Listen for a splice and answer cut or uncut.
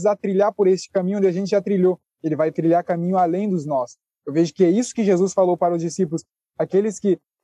uncut